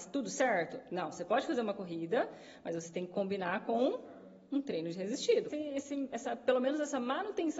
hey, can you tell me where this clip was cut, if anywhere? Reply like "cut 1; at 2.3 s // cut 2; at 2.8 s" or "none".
cut 1; at 5.5 s